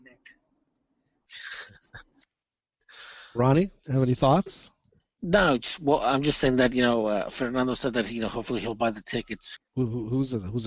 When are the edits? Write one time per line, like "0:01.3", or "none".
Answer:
0:03.8
0:09.6